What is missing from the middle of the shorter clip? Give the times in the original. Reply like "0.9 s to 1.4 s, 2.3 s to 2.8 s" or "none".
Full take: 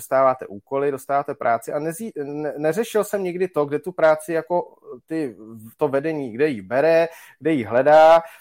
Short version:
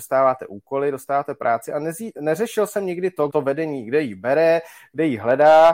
2.2 s to 2.5 s, 3.7 s to 5.8 s

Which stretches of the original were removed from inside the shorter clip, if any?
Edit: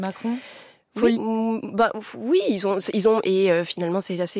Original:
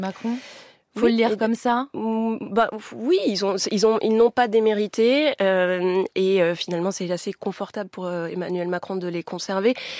1.1 s to 1.9 s, 4.0 s to 6.1 s

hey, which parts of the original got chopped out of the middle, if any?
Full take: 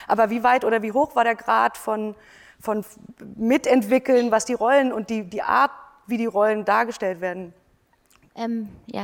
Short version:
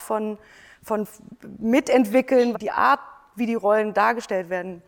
4.3 s to 5.2 s

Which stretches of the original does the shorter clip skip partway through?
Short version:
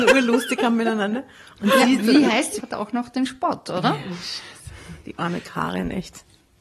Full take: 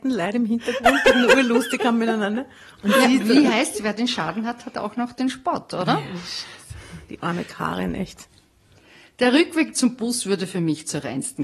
3.8 s to 4.6 s

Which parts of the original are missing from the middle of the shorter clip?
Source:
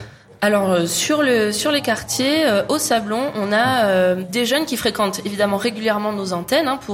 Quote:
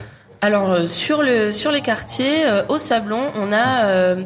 none

